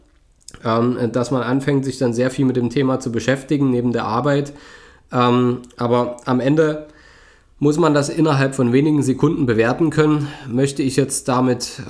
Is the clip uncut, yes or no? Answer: yes